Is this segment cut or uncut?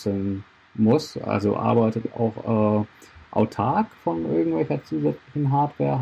uncut